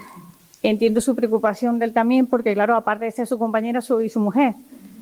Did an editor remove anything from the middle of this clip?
no; 0 cuts

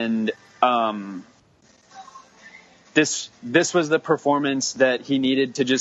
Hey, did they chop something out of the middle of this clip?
no; 0 cuts

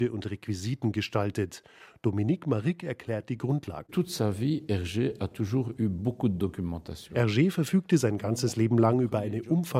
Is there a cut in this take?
no; 0 cuts

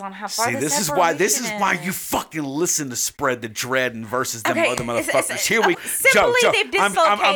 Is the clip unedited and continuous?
no; 1 cut; at 5.7 s

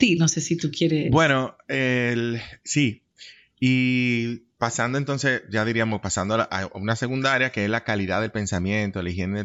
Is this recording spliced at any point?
no; 0 cuts

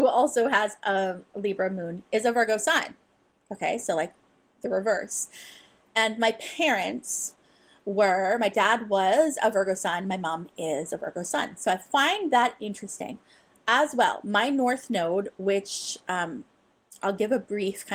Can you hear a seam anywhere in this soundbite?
no; 0 cuts

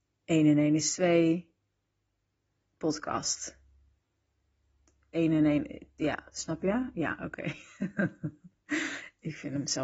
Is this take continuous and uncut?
yes; 0 cuts

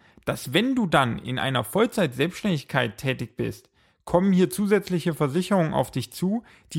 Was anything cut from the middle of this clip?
no; 0 cuts

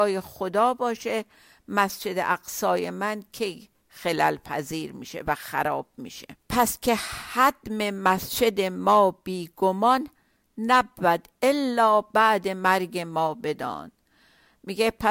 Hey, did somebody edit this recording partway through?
yes; 1 cut; at 6.4 s

